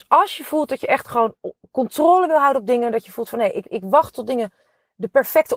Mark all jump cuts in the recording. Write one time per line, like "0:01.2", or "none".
0:03.6